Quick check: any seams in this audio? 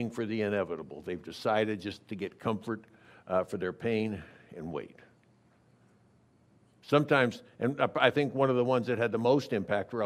no; 0 cuts

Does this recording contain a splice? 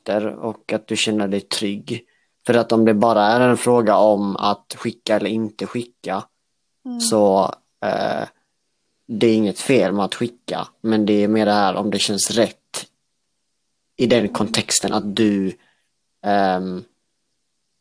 no; 0 cuts

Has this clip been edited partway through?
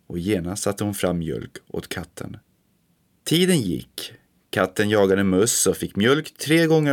no; 0 cuts

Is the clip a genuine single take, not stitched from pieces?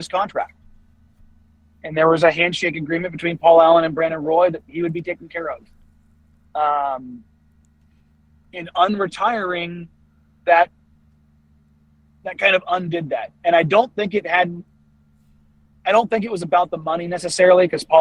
yes; 0 cuts

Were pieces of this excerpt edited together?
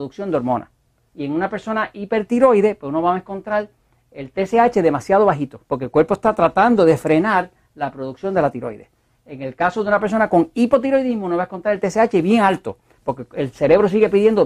yes; 2 cuts; at 1.1 s, 5.6 s

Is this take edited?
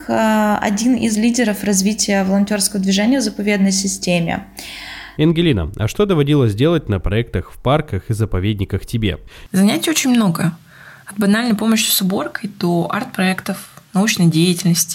yes; 1 cut; at 5.2 s

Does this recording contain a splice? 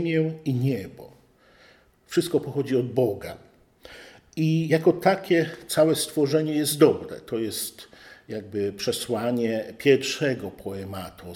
no; 0 cuts

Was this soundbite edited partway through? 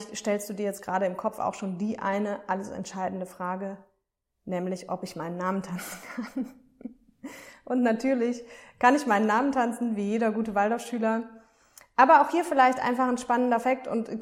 no; 0 cuts

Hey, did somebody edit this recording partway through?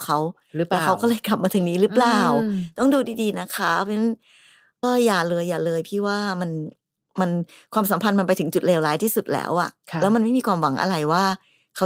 yes; 1 cut; at 4.8 s

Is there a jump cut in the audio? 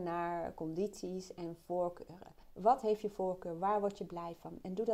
yes; 1 cut; at 2.4 s

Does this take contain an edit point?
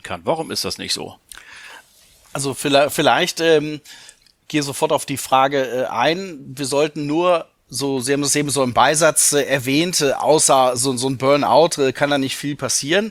no; 0 cuts

